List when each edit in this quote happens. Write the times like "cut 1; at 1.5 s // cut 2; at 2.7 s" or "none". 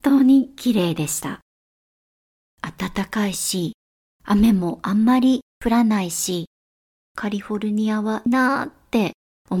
cut 1; at 8.3 s